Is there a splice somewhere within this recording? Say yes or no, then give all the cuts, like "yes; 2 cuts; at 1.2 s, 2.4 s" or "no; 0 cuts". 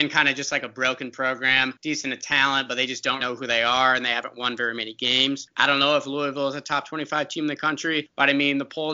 yes; 2 cuts; at 3.2 s, 5.5 s